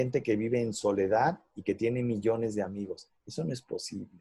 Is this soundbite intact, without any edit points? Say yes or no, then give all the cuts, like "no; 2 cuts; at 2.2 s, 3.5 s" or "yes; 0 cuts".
yes; 0 cuts